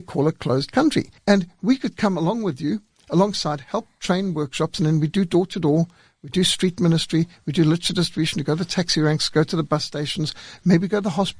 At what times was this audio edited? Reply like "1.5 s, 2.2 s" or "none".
1.2 s

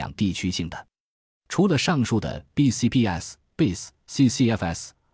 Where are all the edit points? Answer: none

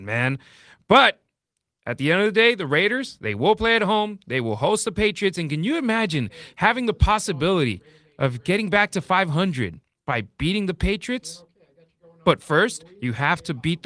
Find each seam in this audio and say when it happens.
none

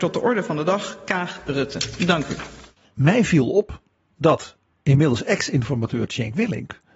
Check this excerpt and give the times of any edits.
none

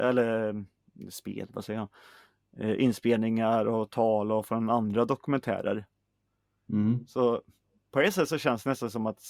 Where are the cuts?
none

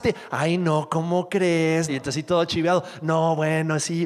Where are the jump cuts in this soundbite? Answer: 1.9 s

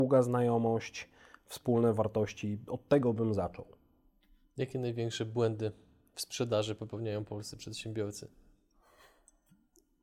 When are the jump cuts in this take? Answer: none

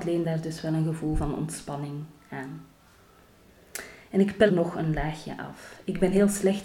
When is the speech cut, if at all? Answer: 4.5 s

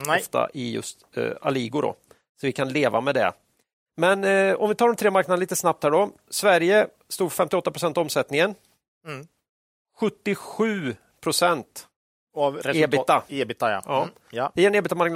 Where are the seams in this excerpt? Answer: 12.2 s

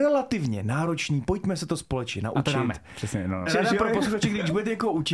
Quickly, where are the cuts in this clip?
3.5 s

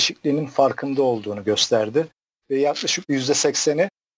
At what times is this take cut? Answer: none

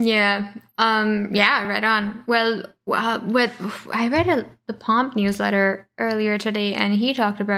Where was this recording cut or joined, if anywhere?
none

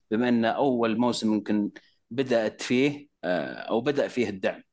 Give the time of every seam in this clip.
3.2 s

